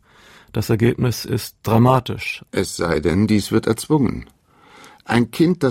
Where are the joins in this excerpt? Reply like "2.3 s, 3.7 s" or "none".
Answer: 2.5 s